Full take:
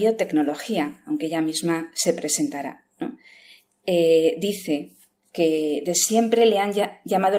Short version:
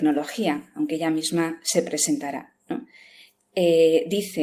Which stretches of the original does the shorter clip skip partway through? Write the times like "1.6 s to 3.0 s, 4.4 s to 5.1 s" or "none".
none